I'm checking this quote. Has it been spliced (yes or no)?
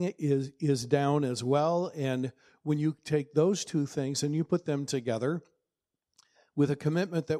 no